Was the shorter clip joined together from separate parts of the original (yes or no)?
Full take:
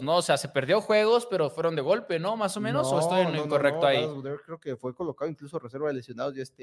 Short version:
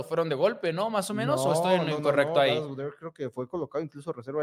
no